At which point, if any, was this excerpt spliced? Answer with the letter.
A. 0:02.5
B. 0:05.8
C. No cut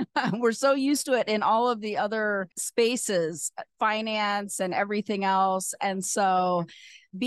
A